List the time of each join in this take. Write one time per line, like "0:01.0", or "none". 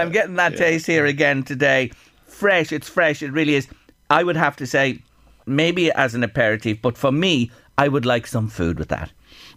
0:05.4